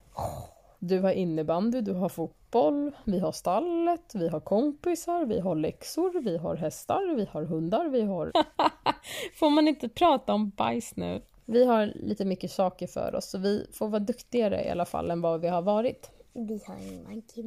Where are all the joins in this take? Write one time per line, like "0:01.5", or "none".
0:08.3
0:11.4